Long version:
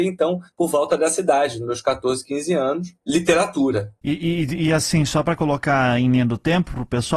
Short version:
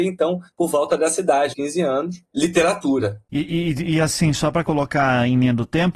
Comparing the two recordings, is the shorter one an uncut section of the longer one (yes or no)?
no